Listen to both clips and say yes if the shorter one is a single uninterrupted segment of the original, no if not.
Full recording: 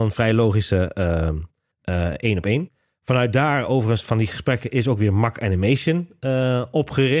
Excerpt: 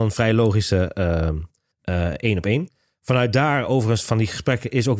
yes